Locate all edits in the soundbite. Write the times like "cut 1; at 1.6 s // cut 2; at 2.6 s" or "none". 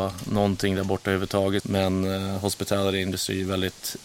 cut 1; at 1.6 s